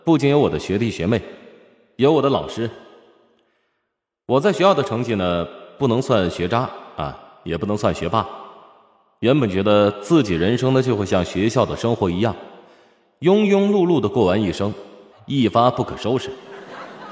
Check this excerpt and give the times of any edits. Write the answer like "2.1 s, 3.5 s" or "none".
15.1 s